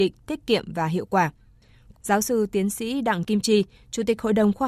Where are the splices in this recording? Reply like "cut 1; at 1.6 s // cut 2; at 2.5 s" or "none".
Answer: cut 1; at 1.9 s